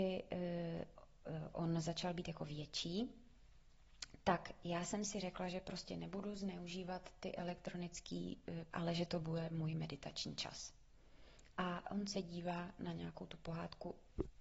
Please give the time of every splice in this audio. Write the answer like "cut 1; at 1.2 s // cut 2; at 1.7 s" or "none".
cut 1; at 8.7 s // cut 2; at 11.5 s